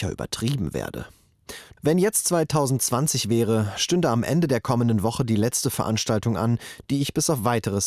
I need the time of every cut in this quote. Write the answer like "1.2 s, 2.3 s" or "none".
1.8 s